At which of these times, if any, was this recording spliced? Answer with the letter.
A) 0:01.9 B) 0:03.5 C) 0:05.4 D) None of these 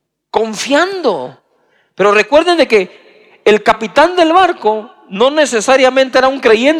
D